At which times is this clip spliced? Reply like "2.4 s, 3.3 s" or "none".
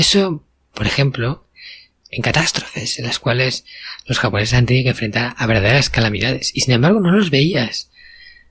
2.0 s